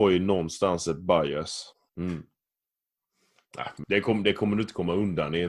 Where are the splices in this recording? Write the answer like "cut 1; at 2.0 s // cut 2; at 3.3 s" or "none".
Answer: cut 1; at 1.9 s // cut 2; at 3.8 s